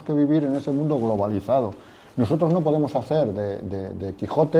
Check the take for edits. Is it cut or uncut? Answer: uncut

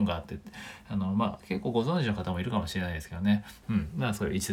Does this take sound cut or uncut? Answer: cut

